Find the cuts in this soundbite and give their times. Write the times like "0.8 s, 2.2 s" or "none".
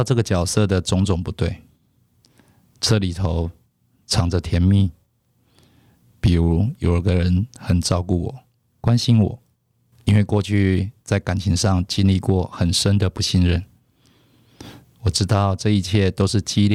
9.9 s, 14.8 s